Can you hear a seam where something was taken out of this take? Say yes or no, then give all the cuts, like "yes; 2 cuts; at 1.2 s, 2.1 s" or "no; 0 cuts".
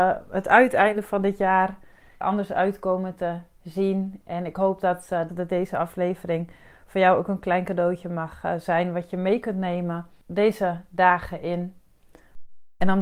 yes; 2 cuts; at 2.2 s, 5.3 s